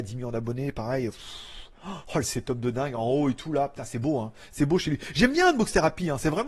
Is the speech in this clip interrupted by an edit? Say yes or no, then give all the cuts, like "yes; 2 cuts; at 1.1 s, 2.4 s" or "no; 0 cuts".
no; 0 cuts